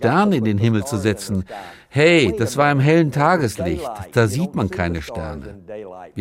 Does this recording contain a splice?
no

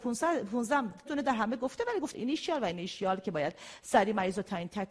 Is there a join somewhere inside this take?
yes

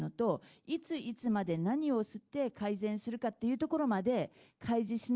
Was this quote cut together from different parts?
no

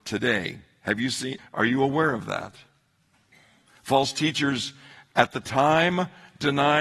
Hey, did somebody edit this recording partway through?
yes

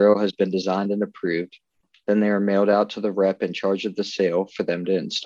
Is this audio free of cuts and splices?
yes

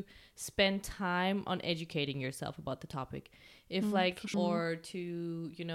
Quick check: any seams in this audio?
yes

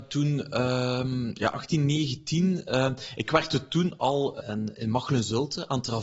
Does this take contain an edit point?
yes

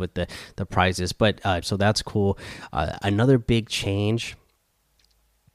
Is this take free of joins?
no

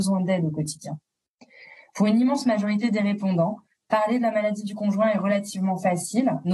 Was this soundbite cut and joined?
no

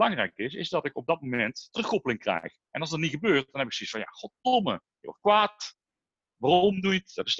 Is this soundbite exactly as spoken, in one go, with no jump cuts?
yes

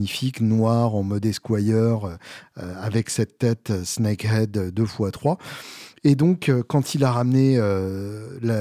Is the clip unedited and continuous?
yes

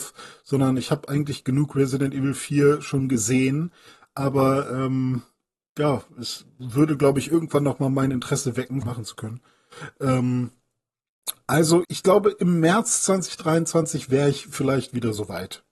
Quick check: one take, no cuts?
no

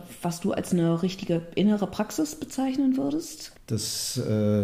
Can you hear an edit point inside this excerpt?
yes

